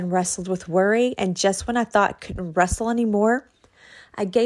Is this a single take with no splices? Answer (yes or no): yes